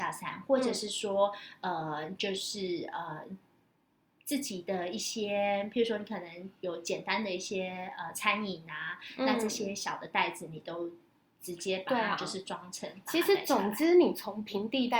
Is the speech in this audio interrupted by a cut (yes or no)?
no